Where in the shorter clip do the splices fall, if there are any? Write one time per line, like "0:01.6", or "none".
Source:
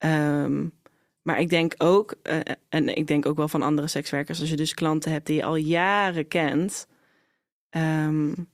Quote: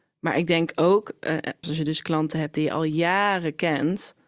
0:01.6

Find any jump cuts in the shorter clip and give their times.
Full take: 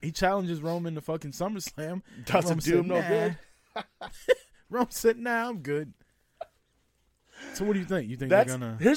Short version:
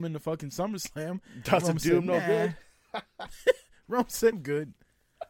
0:04.3

